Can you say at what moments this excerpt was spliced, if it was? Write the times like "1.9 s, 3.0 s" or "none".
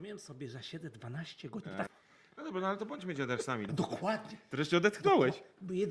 1.9 s, 3.7 s